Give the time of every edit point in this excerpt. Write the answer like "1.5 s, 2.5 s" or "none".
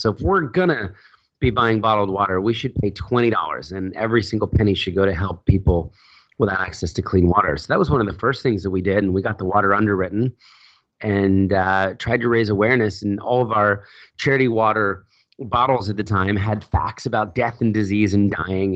none